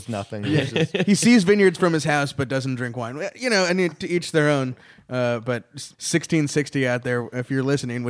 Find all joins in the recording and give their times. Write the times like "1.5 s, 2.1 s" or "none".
5.9 s